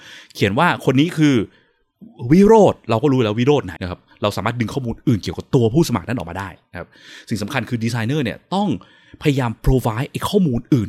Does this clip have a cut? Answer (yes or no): yes